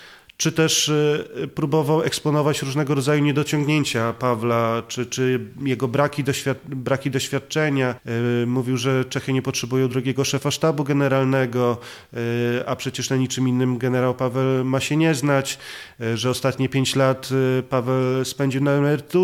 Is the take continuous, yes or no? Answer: yes